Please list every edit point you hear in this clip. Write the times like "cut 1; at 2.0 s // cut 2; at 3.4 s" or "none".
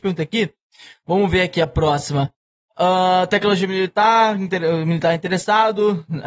none